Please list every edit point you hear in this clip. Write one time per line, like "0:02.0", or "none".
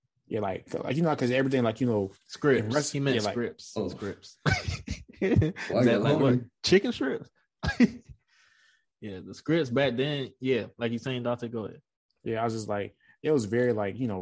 none